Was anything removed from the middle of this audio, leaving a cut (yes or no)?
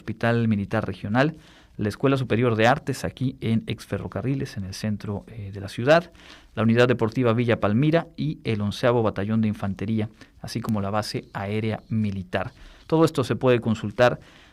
no